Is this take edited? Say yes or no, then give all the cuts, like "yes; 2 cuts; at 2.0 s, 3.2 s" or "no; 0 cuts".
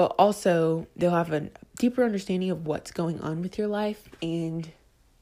no; 0 cuts